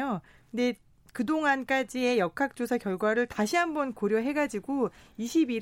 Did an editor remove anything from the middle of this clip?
no; 0 cuts

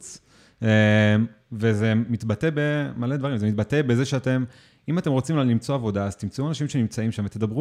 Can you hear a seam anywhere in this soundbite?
no; 0 cuts

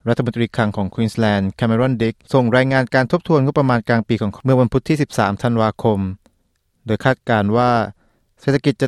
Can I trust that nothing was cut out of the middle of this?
yes; 0 cuts

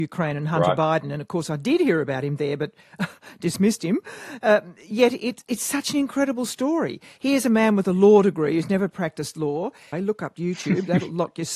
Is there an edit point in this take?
yes; 1 cut; at 9.9 s

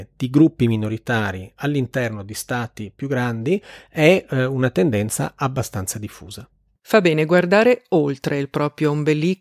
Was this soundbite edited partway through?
no; 0 cuts

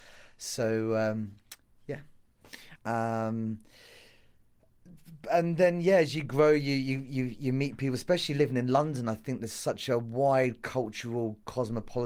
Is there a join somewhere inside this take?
yes; 1 cut; at 2.8 s

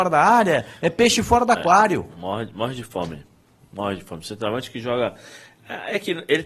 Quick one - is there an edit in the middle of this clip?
no; 0 cuts

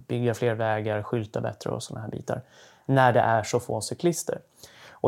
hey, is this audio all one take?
yes; 0 cuts

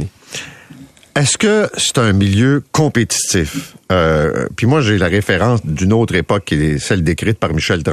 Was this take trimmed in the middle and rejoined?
no; 0 cuts

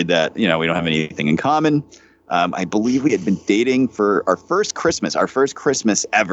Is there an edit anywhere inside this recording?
no; 0 cuts

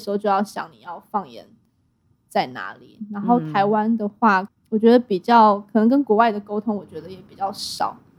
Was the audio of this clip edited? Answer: yes; 1 cut; at 4.5 s

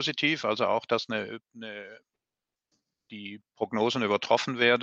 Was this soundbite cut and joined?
no; 0 cuts

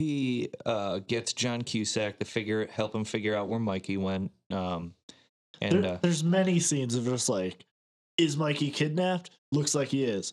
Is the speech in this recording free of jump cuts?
yes; 0 cuts

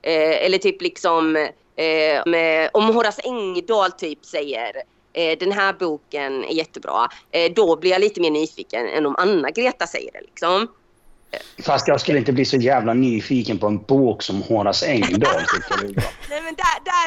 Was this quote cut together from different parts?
yes; 1 cut; at 2.3 s

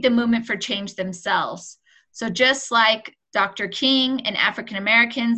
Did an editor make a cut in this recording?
no; 0 cuts

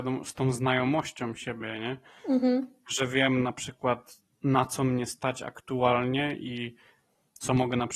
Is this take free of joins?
yes; 0 cuts

